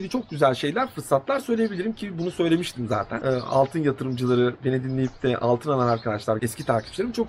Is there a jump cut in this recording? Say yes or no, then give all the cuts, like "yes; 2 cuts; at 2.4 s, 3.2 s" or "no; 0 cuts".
yes; 1 cut; at 6.4 s